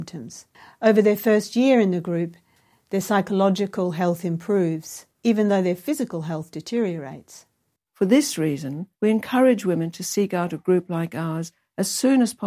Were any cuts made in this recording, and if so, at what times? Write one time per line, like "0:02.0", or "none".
0:08.9